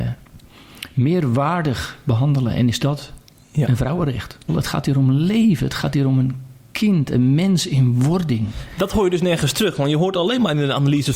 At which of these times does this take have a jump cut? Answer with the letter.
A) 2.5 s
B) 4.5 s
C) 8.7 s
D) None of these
B